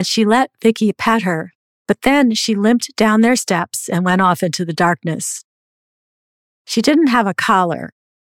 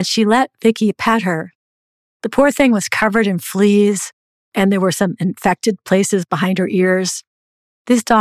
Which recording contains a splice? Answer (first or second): first